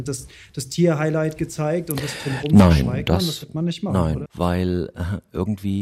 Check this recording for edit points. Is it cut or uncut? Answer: cut